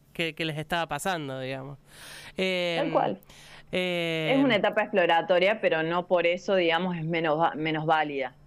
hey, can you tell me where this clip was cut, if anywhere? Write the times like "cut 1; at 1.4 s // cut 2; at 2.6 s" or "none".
cut 1; at 3.7 s